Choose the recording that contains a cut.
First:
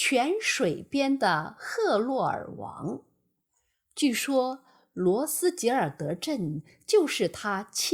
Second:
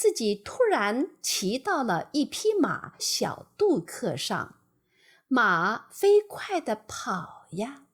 second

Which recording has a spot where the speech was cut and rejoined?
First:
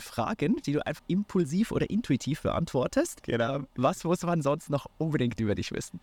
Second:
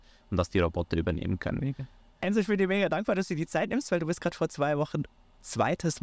first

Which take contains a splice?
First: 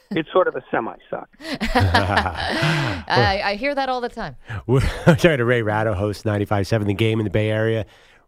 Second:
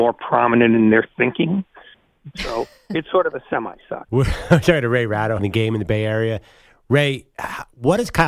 second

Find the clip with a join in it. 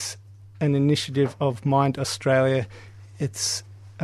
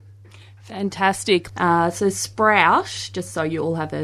second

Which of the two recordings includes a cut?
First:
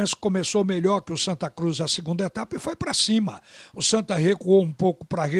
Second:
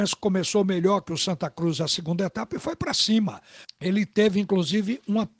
second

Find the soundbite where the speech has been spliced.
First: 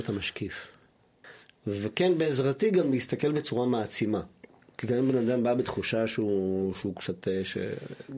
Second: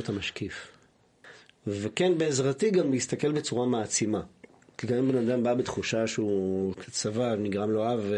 second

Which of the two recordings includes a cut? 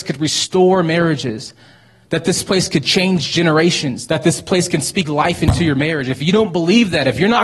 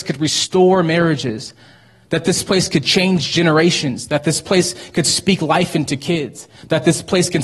first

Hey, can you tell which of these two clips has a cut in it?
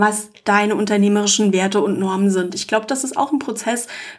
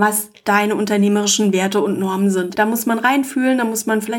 second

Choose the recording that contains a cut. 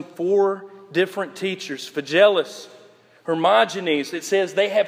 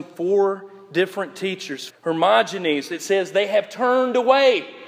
second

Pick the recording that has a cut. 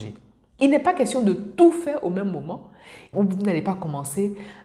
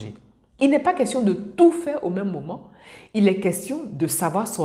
first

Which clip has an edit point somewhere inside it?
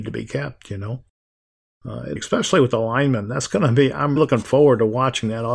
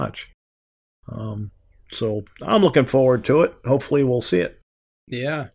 first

